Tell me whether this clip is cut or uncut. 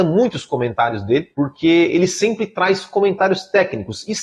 cut